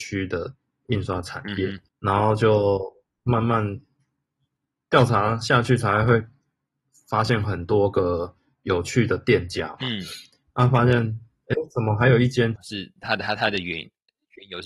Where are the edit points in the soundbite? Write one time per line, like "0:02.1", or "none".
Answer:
0:01.9
0:12.6